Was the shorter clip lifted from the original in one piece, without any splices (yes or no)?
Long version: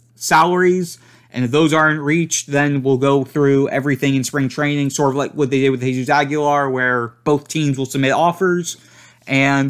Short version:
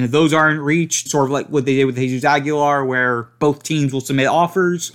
no